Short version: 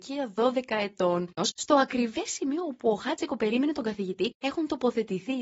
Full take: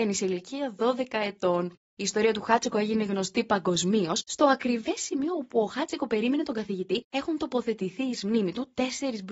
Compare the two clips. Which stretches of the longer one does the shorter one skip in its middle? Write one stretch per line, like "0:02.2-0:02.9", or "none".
0:01.8-0:04.1